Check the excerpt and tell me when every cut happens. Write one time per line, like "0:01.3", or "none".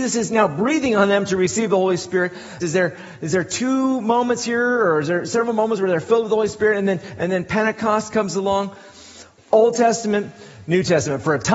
0:02.6
0:09.4